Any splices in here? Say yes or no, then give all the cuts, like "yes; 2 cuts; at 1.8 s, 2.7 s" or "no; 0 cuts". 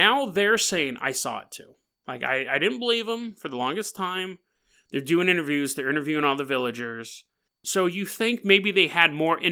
yes; 1 cut; at 7.5 s